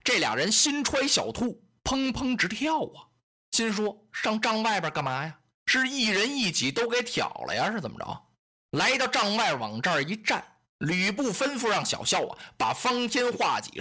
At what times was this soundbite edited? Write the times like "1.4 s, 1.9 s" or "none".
none